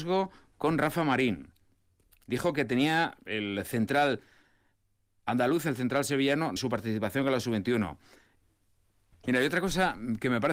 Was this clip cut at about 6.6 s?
yes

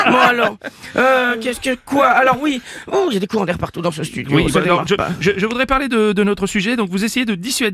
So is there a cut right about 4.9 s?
no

